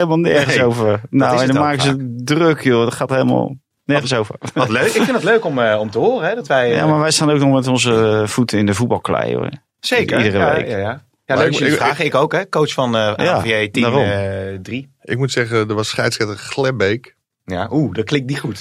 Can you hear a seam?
no; 0 cuts

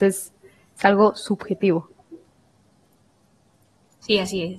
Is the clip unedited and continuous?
yes; 0 cuts

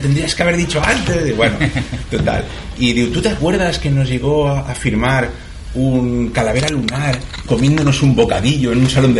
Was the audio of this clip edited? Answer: no; 0 cuts

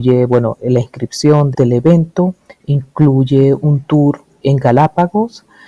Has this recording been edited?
yes; 2 cuts; at 1.5 s, 4.4 s

